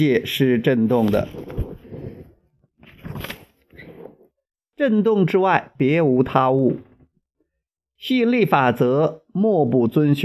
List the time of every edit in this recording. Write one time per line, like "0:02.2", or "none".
none